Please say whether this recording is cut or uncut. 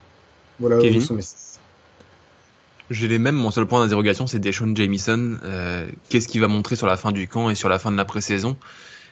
uncut